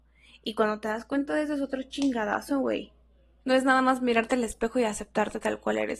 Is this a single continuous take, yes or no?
no